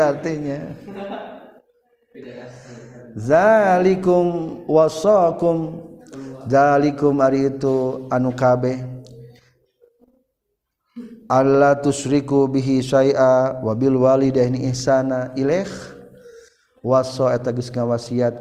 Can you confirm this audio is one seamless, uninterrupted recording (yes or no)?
yes